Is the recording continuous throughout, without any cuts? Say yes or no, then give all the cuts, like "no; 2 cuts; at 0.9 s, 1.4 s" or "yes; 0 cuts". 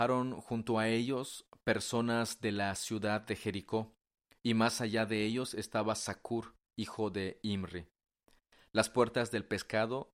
yes; 0 cuts